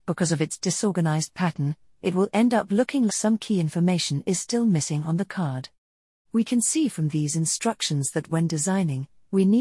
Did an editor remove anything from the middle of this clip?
yes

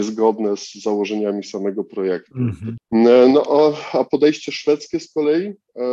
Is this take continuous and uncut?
no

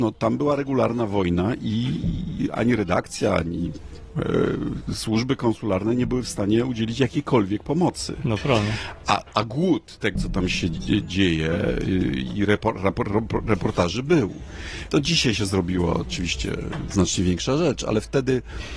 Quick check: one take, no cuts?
no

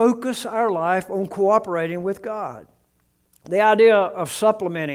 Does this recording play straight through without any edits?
yes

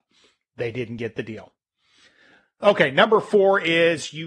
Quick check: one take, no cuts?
yes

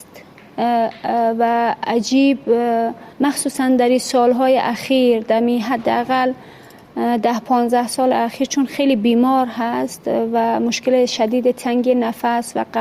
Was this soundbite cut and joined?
yes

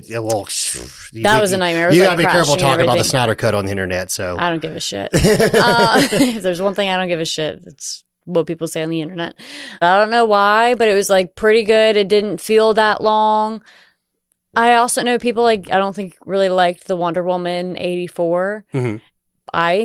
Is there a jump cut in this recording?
yes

